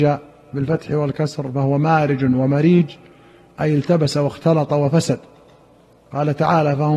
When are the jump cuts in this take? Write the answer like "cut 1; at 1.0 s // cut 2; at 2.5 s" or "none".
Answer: none